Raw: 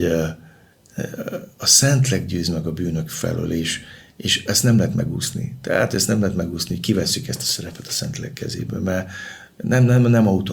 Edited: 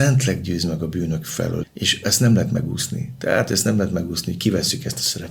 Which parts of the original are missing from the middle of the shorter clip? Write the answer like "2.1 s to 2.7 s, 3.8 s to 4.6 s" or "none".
3.5 s to 4.1 s